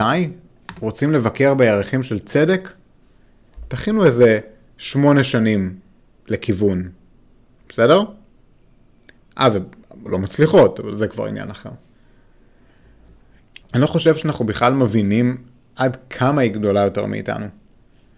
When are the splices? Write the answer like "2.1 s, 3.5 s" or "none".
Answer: 10.1 s, 13.6 s